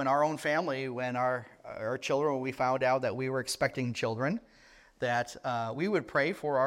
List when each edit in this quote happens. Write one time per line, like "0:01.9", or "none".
none